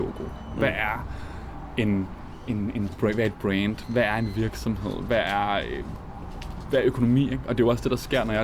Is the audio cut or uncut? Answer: uncut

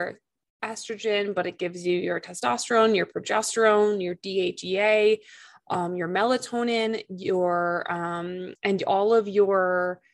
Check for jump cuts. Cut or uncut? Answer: uncut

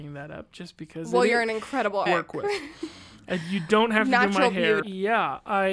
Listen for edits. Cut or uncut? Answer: cut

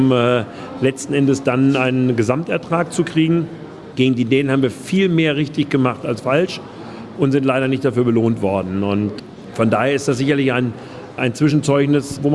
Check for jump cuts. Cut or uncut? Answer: uncut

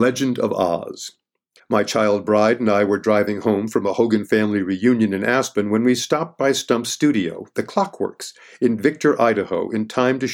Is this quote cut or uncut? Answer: cut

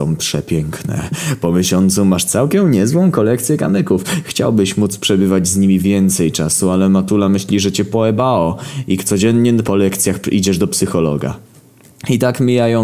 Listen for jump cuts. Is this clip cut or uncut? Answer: uncut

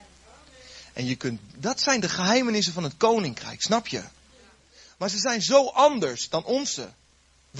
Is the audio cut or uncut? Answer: uncut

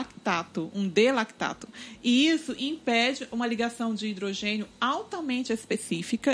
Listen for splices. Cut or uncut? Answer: uncut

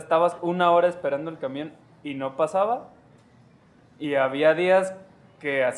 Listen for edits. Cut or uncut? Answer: uncut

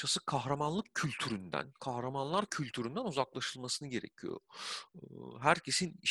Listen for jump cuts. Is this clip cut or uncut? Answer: uncut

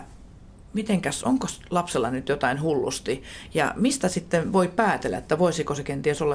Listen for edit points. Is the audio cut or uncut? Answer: uncut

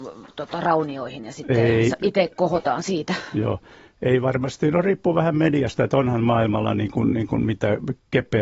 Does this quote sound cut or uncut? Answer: uncut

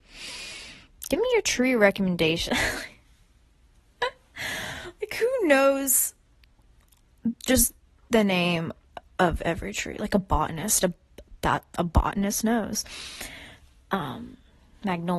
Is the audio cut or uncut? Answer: uncut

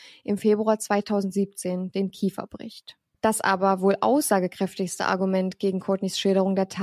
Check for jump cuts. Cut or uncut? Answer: cut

